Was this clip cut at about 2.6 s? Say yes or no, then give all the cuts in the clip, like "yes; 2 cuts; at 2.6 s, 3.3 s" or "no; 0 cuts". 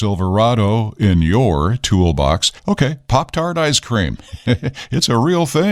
yes; 1 cut; at 2.6 s